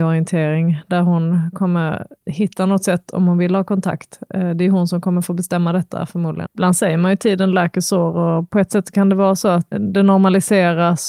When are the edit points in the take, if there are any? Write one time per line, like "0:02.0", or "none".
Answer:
0:02.2
0:06.4
0:09.7